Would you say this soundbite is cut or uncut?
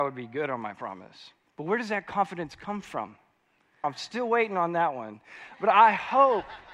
cut